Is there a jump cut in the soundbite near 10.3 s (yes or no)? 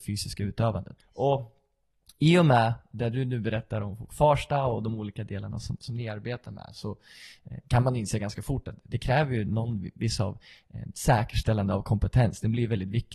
no